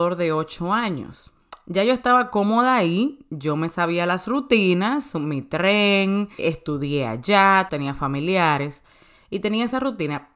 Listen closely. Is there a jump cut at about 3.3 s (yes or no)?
no